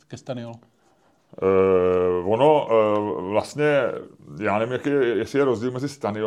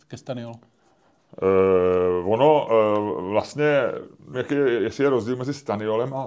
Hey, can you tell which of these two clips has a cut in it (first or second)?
second